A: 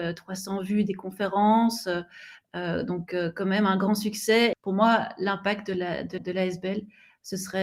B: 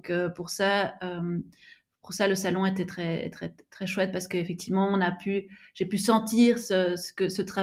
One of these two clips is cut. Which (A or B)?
A